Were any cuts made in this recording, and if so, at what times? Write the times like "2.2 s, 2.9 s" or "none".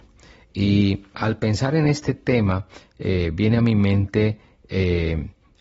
1.1 s